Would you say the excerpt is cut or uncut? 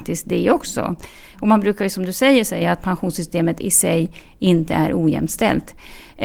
uncut